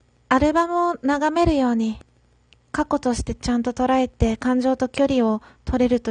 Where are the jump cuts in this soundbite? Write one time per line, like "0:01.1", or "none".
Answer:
0:02.5